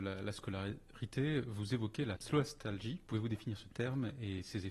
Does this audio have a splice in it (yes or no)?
no